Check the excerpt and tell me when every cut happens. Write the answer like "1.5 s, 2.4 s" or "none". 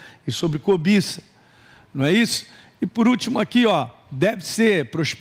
none